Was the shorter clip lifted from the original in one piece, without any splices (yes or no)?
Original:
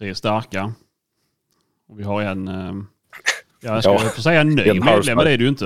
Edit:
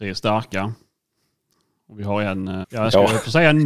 no